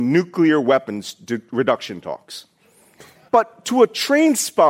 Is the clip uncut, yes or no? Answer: no